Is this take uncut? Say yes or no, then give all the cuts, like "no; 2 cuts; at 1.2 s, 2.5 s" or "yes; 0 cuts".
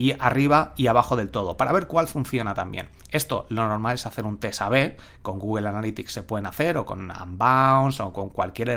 yes; 0 cuts